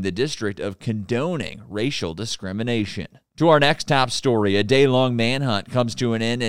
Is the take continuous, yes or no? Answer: yes